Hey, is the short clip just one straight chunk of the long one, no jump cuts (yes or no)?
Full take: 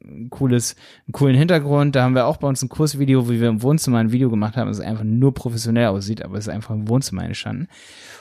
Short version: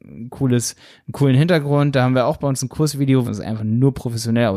no